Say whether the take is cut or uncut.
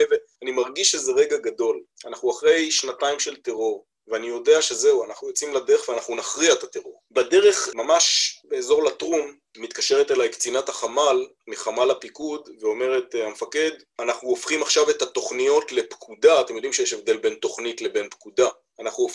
uncut